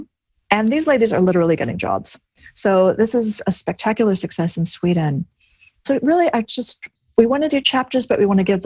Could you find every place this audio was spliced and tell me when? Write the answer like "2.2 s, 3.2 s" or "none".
none